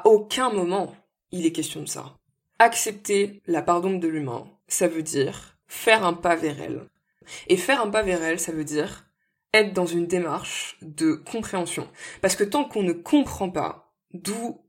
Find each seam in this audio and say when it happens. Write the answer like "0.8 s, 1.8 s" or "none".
none